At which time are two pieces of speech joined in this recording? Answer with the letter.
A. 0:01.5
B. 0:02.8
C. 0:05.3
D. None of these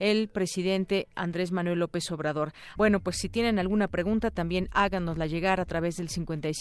B